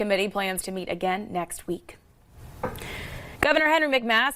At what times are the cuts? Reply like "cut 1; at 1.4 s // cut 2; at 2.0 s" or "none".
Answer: none